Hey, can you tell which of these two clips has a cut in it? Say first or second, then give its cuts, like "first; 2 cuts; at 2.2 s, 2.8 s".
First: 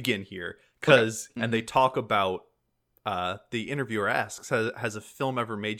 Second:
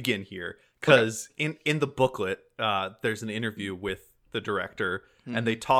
first; 1 cut; at 1.4 s